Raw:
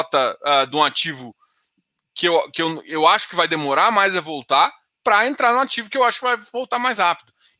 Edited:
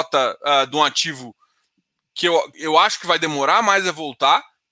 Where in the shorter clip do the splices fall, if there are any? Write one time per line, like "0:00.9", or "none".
0:02.5